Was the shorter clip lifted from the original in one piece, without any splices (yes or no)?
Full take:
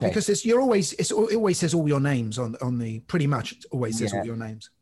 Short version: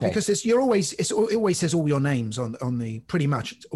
yes